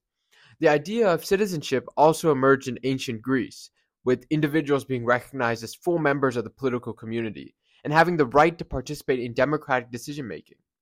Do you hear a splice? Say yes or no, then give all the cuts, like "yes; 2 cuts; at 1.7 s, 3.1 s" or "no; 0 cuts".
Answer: no; 0 cuts